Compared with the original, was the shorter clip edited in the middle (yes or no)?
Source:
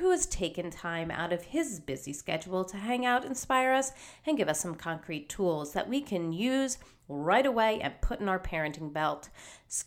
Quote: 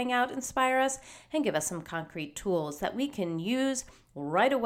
no